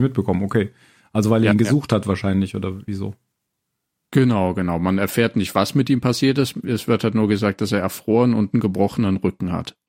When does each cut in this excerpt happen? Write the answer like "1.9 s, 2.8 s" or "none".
none